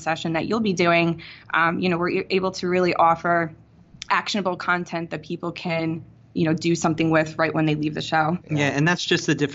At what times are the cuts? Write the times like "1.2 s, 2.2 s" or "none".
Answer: 8.4 s